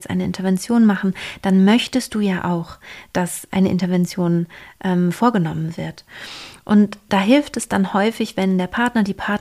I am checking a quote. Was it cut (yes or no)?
no